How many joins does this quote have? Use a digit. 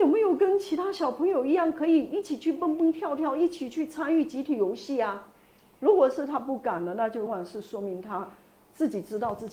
1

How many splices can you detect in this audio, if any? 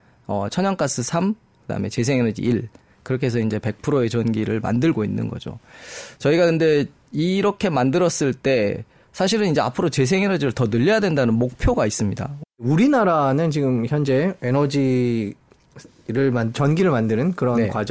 1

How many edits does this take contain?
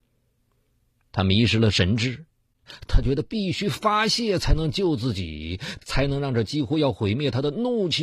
2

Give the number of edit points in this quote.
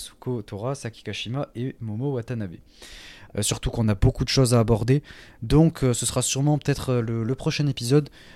1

